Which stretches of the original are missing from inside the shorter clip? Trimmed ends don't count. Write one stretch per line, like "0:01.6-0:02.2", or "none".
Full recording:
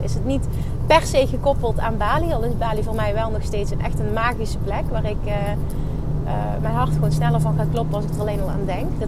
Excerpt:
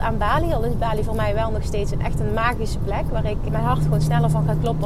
0:05.3-0:06.6